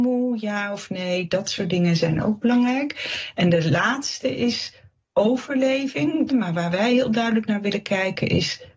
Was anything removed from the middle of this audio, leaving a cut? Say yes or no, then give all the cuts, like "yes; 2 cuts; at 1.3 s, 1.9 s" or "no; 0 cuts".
yes; 1 cut; at 6.3 s